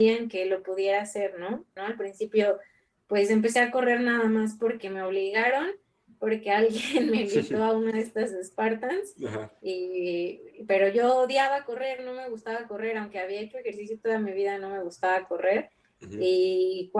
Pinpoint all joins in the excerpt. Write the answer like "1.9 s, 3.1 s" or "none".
1.8 s